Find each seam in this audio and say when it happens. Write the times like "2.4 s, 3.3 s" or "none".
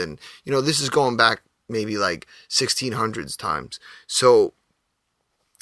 none